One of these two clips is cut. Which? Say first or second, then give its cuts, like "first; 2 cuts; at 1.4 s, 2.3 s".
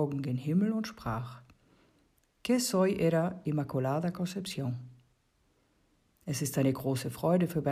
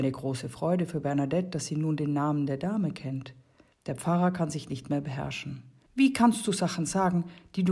second; 2 cuts; at 3.7 s, 5.9 s